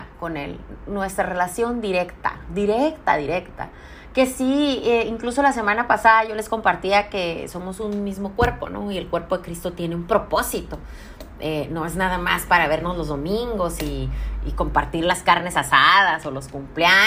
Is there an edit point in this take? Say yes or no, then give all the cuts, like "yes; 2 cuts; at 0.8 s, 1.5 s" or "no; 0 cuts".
no; 0 cuts